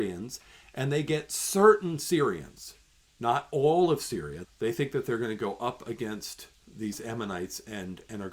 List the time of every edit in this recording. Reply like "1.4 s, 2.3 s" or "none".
4.4 s, 6.6 s